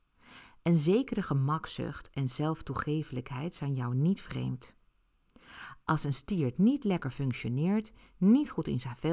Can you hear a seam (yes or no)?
no